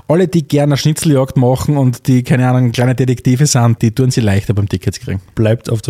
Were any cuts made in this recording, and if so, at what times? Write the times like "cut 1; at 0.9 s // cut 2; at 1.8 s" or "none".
cut 1; at 3.8 s